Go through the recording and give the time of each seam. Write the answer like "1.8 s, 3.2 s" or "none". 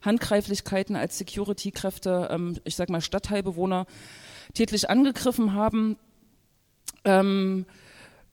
none